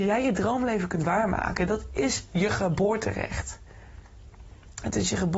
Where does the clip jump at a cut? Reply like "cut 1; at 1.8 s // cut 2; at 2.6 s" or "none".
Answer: none